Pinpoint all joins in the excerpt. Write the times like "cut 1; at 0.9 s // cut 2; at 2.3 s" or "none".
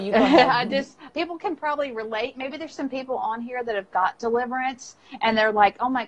cut 1; at 1.1 s